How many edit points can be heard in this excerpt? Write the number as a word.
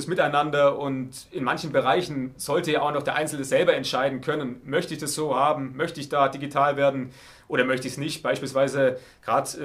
zero